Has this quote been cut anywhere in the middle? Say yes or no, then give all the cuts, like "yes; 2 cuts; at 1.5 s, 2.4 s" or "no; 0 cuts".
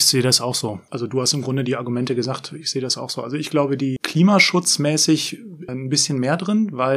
yes; 2 cuts; at 4.0 s, 5.7 s